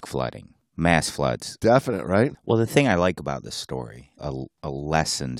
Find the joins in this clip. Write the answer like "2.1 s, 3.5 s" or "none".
2.3 s, 4.2 s